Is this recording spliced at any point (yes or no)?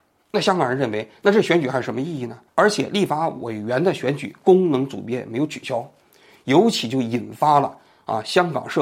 yes